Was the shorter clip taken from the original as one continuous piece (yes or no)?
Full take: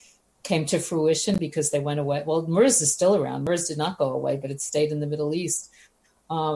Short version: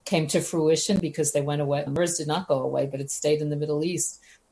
no